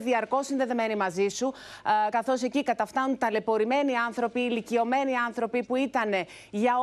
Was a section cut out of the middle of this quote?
no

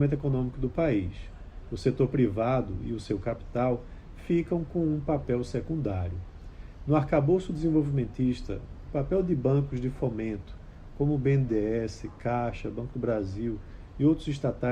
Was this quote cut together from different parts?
no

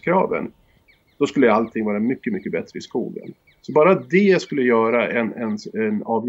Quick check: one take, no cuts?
yes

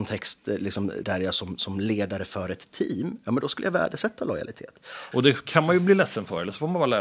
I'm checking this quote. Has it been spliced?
yes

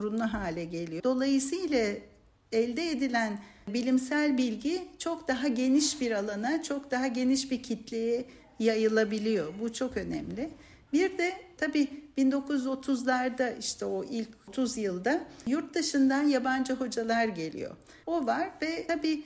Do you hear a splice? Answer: yes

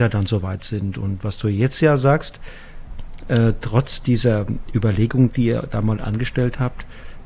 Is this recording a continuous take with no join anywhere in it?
yes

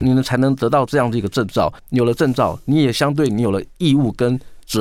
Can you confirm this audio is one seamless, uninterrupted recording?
yes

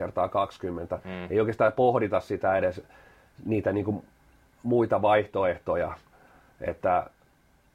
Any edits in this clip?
no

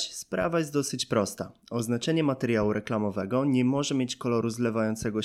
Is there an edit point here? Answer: no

